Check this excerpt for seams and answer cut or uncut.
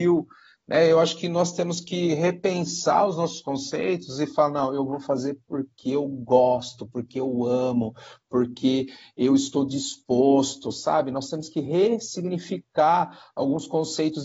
uncut